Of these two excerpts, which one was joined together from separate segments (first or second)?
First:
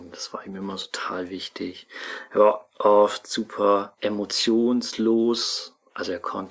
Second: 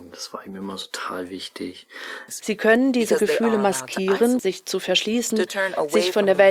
second